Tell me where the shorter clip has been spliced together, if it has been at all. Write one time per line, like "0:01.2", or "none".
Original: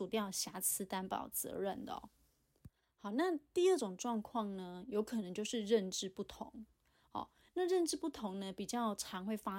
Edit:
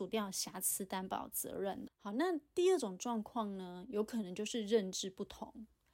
0:01.9